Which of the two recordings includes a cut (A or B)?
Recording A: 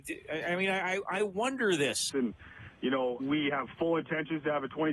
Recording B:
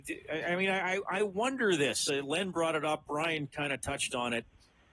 A